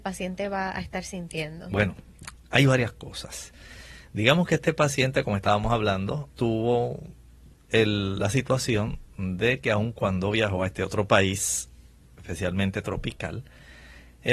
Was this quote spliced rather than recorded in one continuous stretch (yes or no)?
yes